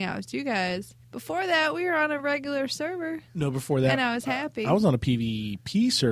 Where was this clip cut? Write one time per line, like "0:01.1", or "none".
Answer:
0:01.0